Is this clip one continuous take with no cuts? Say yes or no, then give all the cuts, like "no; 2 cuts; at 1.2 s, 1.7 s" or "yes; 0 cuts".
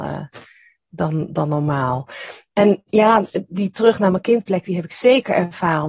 yes; 0 cuts